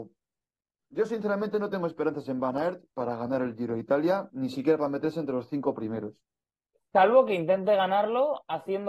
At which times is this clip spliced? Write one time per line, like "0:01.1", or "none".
none